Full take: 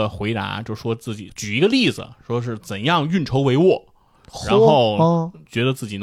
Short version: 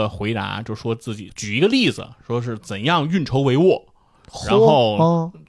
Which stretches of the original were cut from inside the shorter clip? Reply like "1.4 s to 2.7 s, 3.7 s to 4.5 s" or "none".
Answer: none